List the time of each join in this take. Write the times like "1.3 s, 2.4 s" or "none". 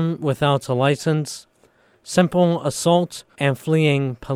3.3 s